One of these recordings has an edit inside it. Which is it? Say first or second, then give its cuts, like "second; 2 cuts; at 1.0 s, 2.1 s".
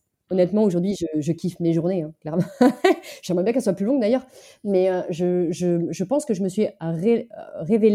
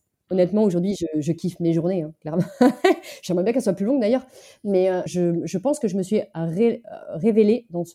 second; 1 cut; at 5.1 s